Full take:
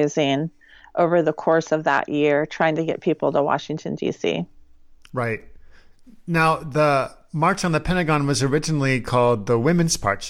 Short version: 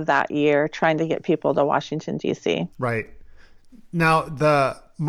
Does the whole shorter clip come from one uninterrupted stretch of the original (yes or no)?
no